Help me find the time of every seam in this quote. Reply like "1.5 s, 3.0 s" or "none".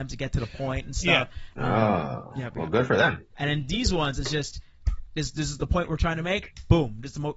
1.5 s, 3.3 s